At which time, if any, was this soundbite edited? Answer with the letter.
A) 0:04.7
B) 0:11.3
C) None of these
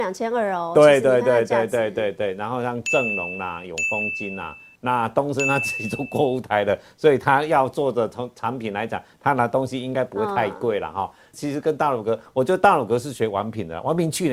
B